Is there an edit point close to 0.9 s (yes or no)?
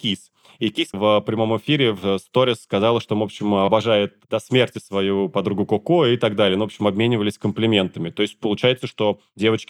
yes